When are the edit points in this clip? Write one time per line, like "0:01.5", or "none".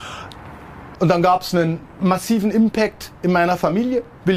0:00.9